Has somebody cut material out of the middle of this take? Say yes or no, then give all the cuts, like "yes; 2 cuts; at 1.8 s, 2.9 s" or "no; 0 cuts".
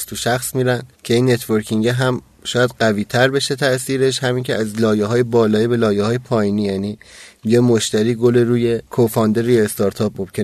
yes; 2 cuts; at 0.9 s, 8.9 s